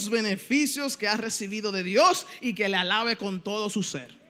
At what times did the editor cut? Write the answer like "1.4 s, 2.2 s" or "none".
none